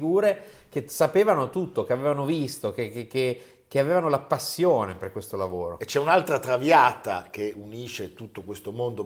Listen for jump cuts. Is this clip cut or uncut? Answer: uncut